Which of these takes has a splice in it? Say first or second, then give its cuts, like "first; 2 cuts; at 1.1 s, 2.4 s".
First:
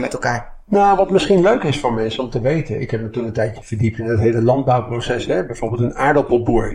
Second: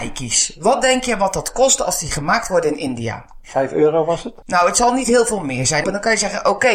second; 2 cuts; at 4.4 s, 5.8 s